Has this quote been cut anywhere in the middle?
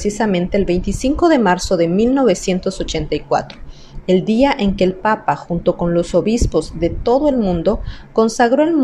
no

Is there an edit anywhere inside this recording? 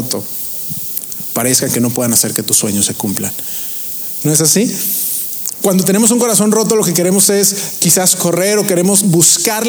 yes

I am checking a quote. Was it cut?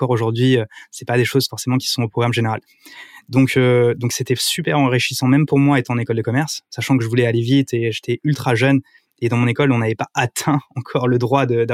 no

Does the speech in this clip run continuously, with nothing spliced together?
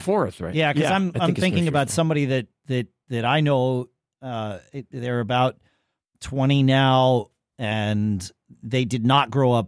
yes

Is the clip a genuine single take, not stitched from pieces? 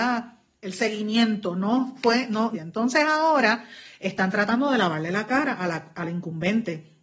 no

